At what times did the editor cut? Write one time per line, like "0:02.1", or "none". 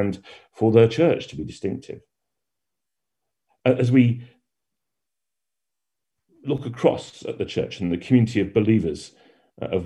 none